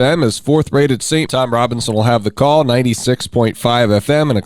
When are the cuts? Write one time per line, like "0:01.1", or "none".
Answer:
0:01.3